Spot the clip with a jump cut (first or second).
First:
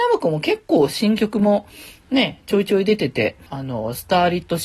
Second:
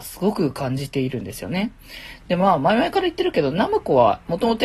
first